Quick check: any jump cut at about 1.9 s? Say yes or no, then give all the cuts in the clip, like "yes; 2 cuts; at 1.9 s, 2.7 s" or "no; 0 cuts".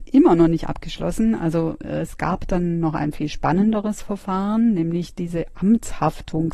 no; 0 cuts